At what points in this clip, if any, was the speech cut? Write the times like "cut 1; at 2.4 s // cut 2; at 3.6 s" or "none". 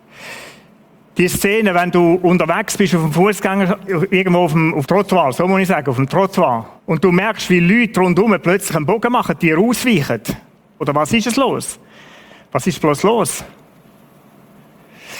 cut 1; at 4.8 s // cut 2; at 6.8 s // cut 3; at 10.8 s